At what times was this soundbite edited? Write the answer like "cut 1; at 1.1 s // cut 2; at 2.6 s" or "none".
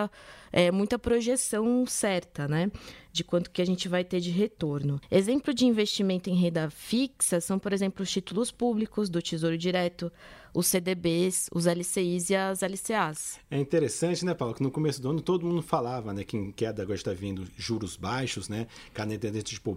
none